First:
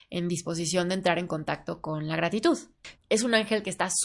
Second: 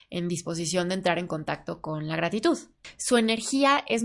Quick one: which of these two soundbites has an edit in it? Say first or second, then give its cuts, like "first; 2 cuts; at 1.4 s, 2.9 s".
first; 1 cut; at 2.9 s